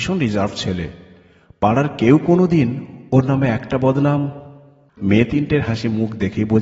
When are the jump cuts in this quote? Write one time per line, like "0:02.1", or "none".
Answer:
0:05.7